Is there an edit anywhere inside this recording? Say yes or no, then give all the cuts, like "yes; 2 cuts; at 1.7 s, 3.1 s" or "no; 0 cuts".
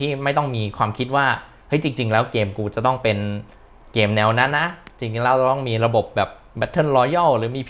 yes; 1 cut; at 4.5 s